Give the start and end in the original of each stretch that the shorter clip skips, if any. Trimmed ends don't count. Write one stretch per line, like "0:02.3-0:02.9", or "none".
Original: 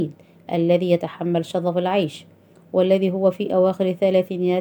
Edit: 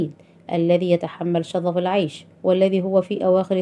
0:02.3-0:02.6